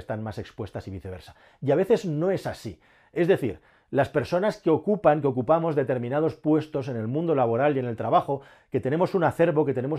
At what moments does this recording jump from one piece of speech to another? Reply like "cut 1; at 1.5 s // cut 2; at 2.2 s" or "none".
none